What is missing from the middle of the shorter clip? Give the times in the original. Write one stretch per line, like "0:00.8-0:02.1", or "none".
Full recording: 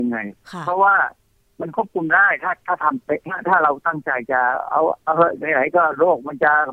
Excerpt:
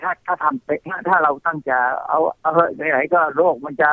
0:04.0-0:04.3

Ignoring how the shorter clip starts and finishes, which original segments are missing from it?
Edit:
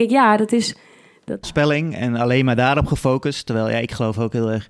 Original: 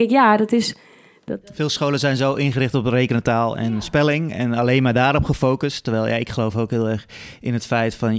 0:01.4-0:03.8

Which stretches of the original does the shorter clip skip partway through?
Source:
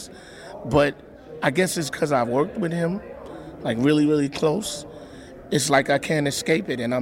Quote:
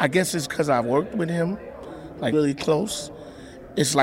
0:03.7-0:04.1

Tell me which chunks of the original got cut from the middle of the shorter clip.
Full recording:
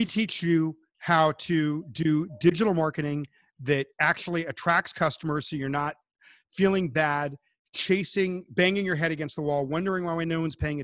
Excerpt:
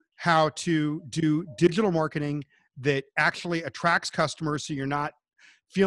none

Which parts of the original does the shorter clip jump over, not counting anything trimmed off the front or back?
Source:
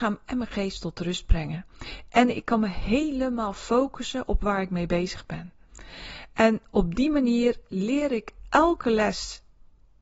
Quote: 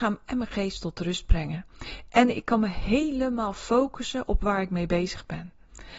none

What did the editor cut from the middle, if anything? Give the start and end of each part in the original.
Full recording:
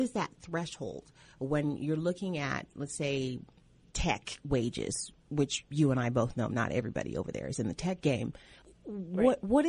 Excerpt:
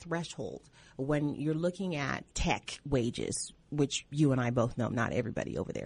0:02.7-0:03.9

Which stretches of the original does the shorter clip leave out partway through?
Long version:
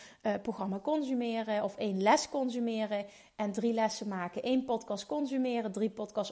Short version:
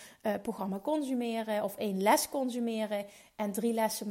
none

